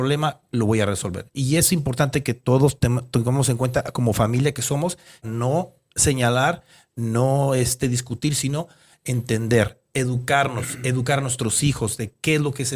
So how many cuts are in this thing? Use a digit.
1